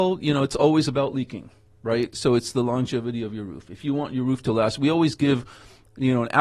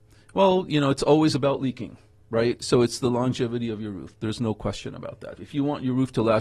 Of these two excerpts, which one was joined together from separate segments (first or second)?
second